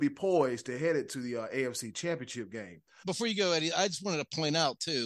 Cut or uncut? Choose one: cut